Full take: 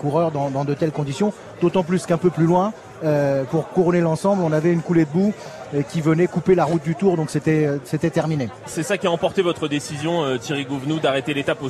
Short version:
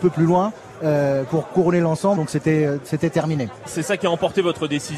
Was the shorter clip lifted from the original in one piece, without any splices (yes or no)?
no